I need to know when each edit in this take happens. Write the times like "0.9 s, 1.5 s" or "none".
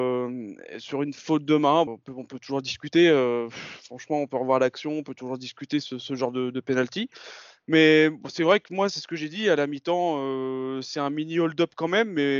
1.9 s